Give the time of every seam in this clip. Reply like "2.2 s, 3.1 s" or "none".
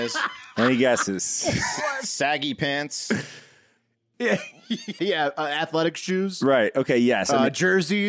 5.0 s